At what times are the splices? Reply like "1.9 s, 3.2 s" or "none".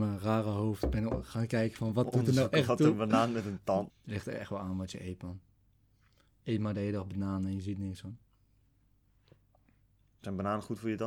3.9 s

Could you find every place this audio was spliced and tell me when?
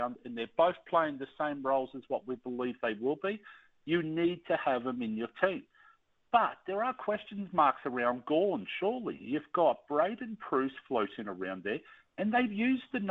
none

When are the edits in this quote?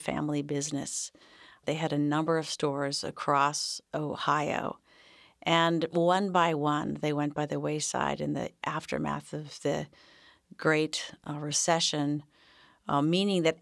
none

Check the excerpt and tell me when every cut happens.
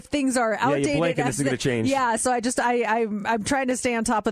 none

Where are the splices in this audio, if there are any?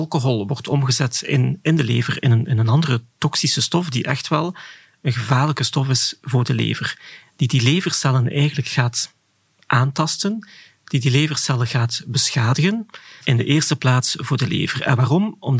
13.2 s

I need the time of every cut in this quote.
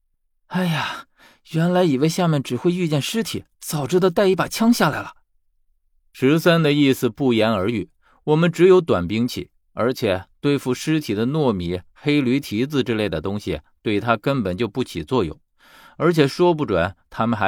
3.5 s

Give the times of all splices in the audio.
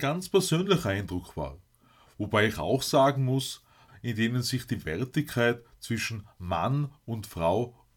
3.9 s

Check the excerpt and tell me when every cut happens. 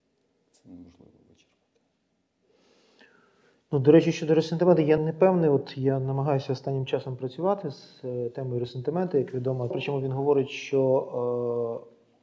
5.0 s, 9.7 s

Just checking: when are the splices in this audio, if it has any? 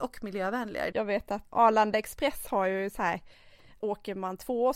0.9 s, 3.8 s

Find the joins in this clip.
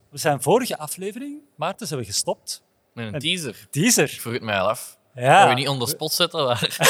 none

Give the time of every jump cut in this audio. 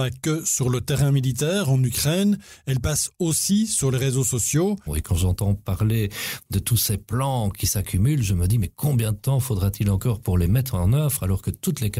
4.9 s

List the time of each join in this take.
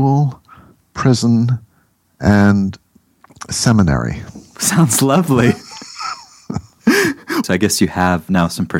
7.4 s

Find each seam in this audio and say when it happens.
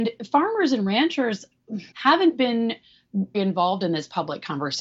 1.9 s, 3.3 s

